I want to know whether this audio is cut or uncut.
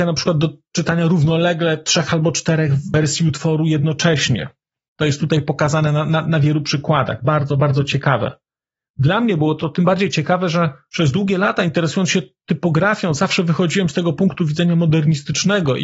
uncut